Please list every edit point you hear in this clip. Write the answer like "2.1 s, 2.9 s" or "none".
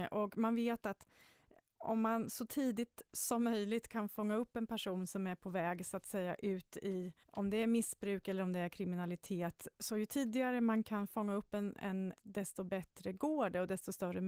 7.2 s, 12.2 s